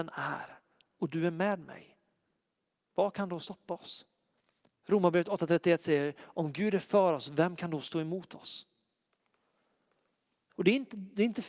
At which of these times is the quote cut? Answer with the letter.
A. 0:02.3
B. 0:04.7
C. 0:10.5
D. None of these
C